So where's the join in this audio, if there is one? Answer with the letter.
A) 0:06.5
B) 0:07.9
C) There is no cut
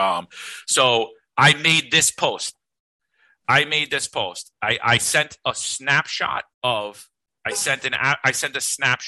A